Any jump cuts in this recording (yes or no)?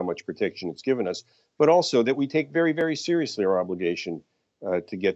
no